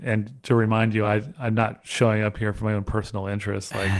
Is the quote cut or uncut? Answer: uncut